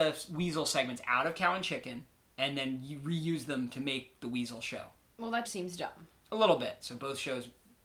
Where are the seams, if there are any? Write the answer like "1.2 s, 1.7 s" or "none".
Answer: 5.4 s, 6.8 s